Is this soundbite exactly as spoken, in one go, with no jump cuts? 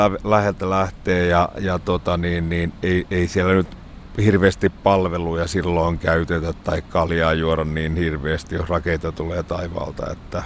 yes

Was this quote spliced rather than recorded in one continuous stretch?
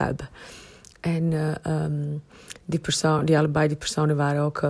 no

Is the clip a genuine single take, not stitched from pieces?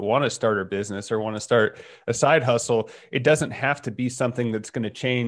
yes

